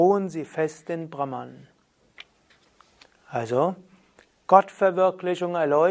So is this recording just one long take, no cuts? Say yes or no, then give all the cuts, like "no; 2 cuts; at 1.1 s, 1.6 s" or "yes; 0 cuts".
yes; 0 cuts